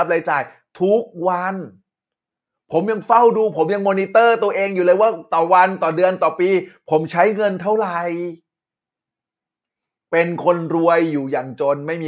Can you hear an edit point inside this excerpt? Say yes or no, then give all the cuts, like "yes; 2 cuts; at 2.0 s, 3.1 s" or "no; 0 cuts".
no; 0 cuts